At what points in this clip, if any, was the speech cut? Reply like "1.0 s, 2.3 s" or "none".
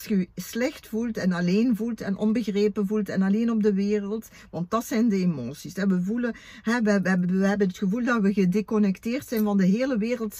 7.2 s